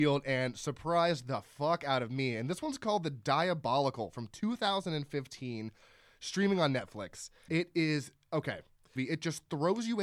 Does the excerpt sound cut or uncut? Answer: cut